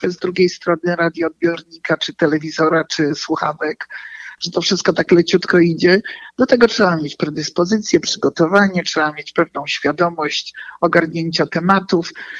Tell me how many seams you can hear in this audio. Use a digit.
0